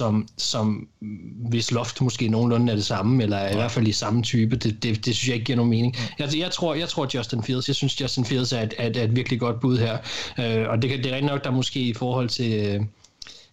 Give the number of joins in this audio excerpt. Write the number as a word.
zero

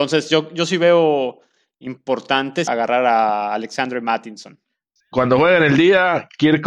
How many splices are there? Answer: two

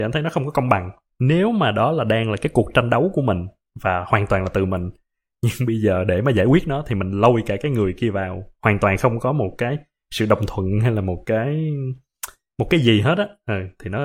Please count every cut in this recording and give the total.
zero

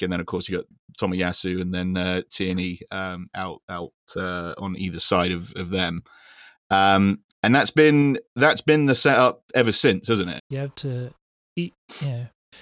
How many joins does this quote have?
two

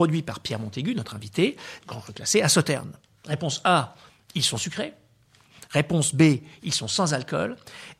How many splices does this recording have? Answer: one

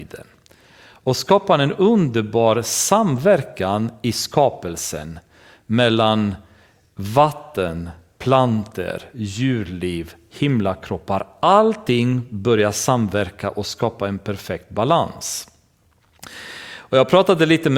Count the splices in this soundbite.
zero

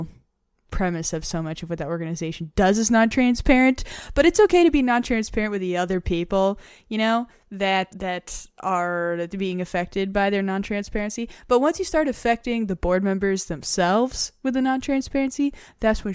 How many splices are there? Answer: one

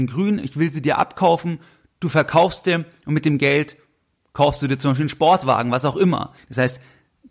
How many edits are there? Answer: one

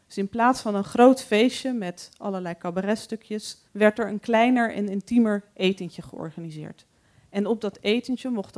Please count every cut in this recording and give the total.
one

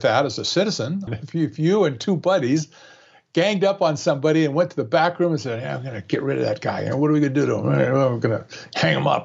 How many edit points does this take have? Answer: one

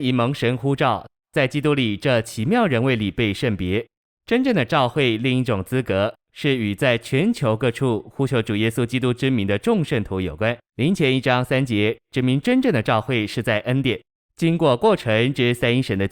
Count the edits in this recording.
two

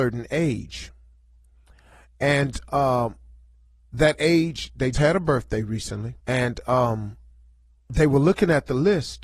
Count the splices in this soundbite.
two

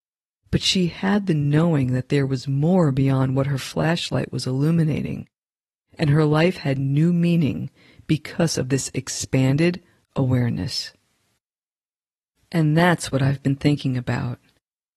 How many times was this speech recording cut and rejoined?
zero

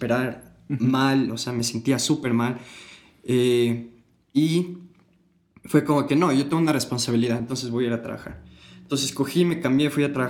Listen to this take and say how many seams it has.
zero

